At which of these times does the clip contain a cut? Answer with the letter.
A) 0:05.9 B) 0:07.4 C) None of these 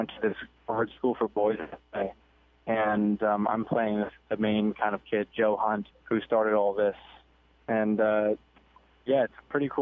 A